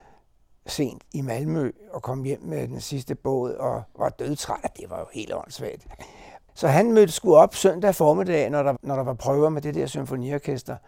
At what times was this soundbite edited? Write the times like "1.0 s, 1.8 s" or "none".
8.7 s